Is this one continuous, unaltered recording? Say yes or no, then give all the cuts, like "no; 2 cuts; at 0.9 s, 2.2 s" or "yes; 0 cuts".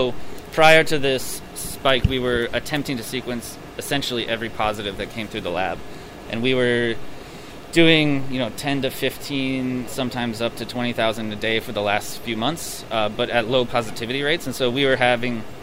no; 2 cuts; at 6.2 s, 9.9 s